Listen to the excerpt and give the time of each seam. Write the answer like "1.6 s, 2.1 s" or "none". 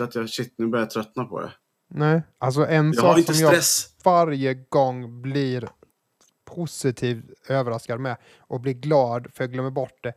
none